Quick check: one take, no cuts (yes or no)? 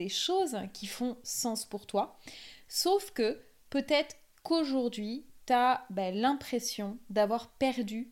yes